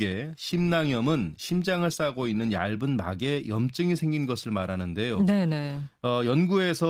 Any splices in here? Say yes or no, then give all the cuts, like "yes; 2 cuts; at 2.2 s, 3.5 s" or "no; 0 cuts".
no; 0 cuts